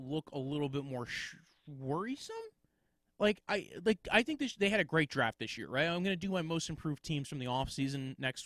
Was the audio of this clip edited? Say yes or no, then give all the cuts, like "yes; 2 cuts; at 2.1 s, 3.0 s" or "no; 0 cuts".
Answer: no; 0 cuts